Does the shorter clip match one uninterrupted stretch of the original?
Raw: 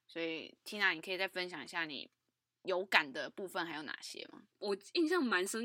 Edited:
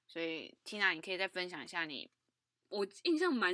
no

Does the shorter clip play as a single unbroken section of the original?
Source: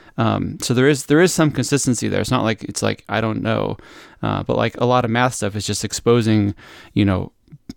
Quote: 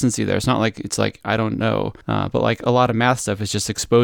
no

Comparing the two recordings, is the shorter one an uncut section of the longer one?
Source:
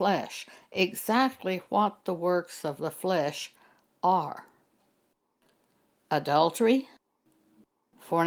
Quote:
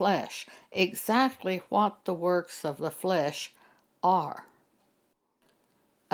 yes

